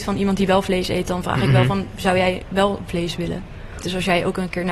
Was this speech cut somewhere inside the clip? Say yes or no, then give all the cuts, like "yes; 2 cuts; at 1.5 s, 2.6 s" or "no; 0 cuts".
yes; 1 cut; at 3.8 s